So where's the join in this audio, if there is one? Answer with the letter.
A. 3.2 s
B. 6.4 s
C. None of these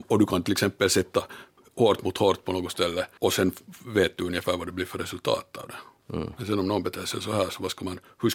A